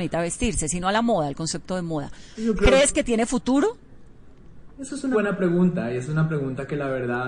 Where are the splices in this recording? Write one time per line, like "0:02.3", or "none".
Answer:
0:02.3
0:05.1

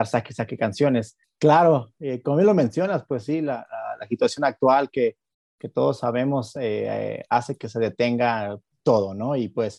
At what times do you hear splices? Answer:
0:01.2

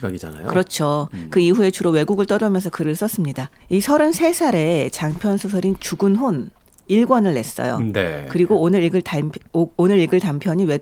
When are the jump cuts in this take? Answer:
0:03.6

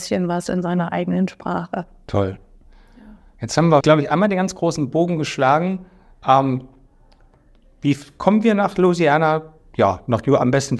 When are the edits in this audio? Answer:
0:03.8

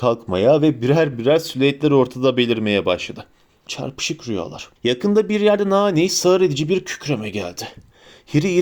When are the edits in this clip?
0:03.7
0:04.8

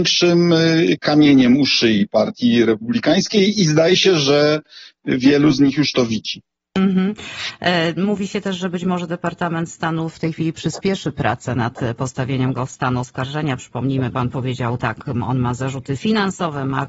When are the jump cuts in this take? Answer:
none

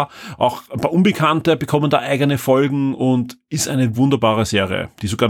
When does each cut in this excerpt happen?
0:03.9

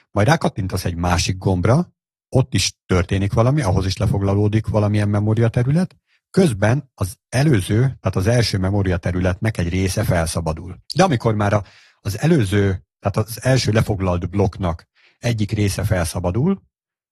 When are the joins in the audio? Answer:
0:10.8

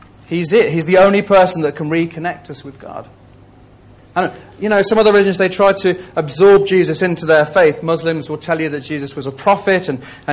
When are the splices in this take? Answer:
none

